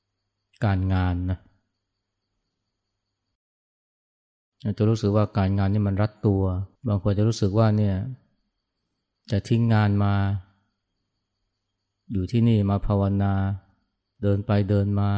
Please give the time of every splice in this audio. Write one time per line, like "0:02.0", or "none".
0:06.8